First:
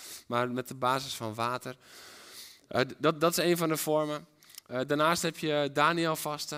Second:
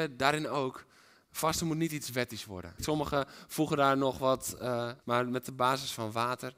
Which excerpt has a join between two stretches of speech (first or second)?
second